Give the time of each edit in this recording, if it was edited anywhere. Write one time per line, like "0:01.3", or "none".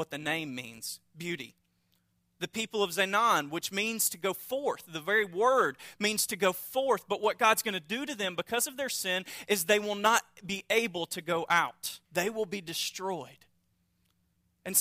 0:12.0